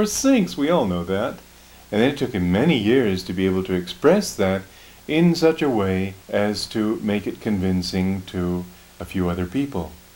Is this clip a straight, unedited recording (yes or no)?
no